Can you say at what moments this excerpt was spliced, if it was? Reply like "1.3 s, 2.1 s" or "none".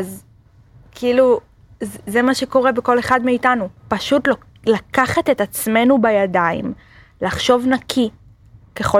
3.8 s